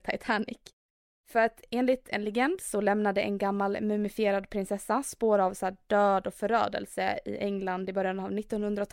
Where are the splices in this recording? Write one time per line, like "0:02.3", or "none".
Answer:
none